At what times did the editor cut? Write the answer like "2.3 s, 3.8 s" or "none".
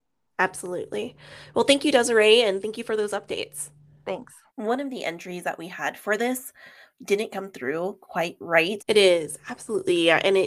4.5 s, 8.8 s